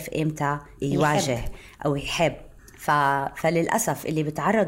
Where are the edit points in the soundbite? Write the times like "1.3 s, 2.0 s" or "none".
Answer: none